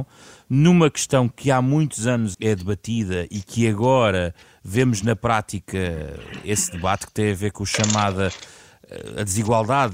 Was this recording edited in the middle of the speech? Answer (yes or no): yes